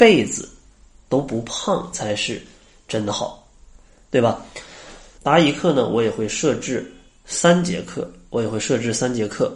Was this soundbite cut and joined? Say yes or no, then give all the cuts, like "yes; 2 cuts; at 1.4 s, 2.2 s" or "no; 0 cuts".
yes; 1 cut; at 5.2 s